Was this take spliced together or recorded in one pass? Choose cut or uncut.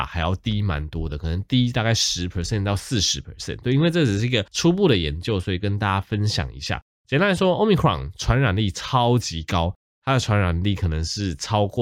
uncut